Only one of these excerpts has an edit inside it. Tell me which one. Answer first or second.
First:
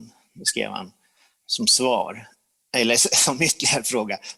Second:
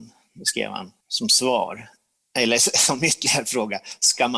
second